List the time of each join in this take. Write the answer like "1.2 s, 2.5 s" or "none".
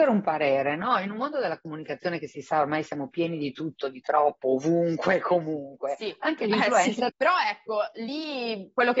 7.1 s